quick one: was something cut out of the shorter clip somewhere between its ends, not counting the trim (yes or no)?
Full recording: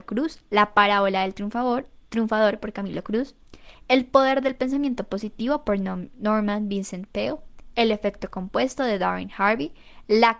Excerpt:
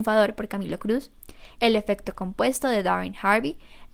yes